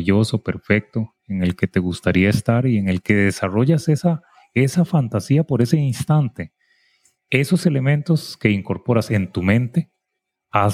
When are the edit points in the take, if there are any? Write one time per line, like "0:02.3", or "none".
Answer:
none

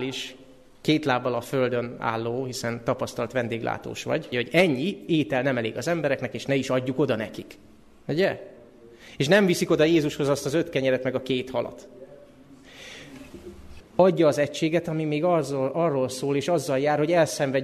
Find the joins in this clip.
0:04.3
0:13.8

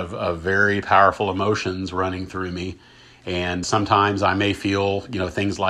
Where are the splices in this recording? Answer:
0:03.6

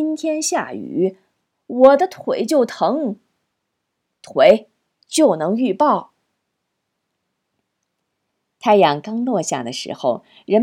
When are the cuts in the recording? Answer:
none

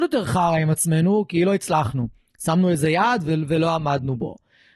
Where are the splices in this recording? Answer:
none

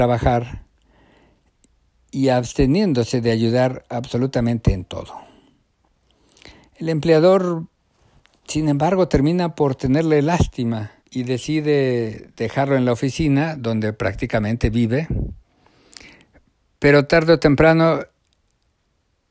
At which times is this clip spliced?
0:11.0

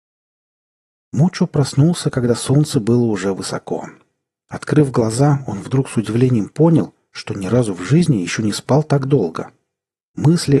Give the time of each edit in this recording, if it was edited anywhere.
none

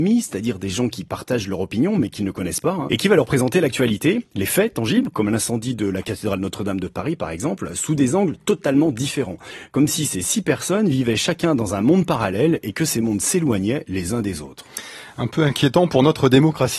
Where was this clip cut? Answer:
0:02.9

